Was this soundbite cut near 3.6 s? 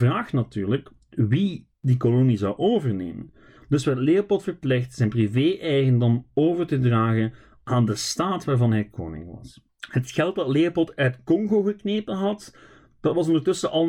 yes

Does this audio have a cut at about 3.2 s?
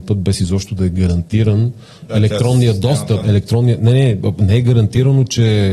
yes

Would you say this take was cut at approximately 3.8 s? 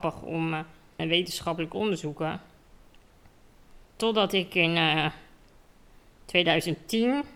yes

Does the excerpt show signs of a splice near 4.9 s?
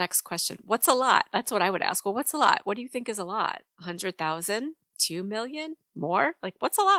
yes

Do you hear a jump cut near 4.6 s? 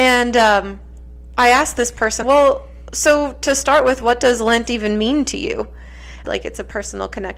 no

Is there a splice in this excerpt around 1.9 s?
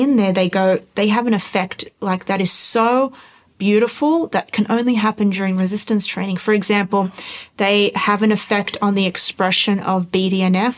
no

